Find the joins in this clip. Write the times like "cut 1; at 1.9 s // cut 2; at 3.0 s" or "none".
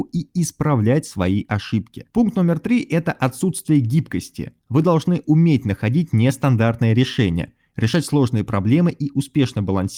cut 1; at 2.1 s // cut 2; at 4.6 s

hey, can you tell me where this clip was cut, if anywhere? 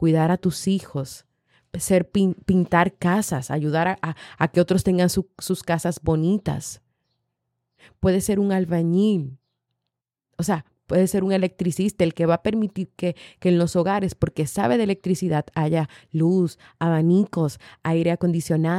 none

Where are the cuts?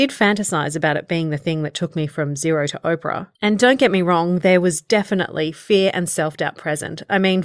cut 1; at 3.3 s

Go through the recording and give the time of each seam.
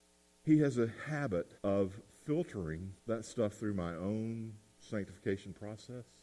cut 1; at 1.6 s // cut 2; at 3.0 s

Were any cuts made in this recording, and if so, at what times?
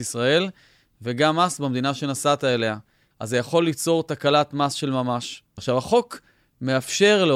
cut 1; at 3.1 s // cut 2; at 5.6 s

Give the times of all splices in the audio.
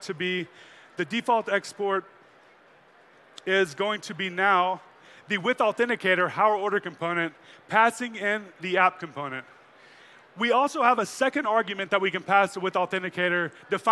none

